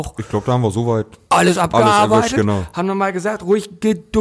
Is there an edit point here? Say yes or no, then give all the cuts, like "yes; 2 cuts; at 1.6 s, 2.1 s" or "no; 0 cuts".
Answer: no; 0 cuts